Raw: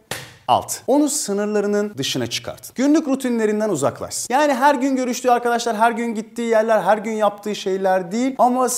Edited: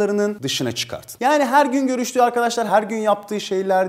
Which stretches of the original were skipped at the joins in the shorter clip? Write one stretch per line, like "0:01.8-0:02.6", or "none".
0:02.7-0:04.3
0:05.8-0:06.8